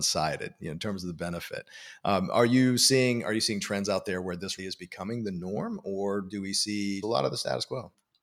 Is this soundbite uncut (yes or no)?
no